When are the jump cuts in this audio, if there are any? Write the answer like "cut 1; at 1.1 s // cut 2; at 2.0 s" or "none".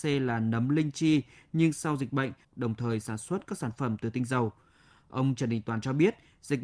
cut 1; at 2.4 s